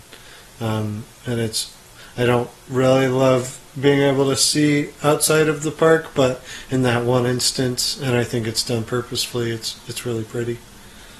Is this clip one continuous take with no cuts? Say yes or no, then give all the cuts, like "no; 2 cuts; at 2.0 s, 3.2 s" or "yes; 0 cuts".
yes; 0 cuts